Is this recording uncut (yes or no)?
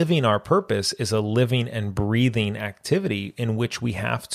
yes